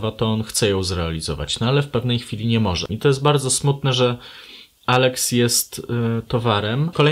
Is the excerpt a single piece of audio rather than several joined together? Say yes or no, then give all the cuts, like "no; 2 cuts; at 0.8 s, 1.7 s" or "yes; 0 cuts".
no; 1 cut; at 2.9 s